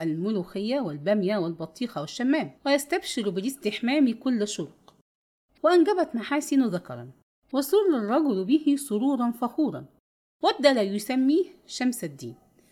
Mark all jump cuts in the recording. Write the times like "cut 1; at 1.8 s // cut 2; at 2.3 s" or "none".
cut 1; at 2.6 s